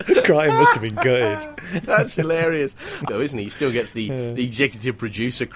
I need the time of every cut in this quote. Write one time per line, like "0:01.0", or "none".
0:03.1